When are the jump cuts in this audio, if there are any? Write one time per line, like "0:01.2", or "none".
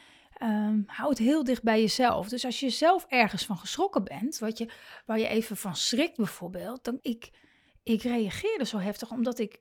0:04.4
0:07.0